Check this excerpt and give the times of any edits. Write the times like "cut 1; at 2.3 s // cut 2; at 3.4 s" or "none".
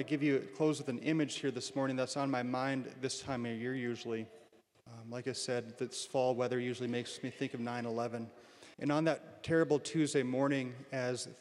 cut 1; at 4.9 s // cut 2; at 8.7 s